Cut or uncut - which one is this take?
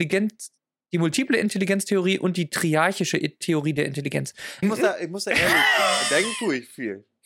cut